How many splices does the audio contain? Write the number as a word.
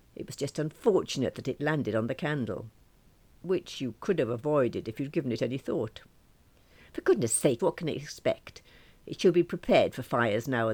one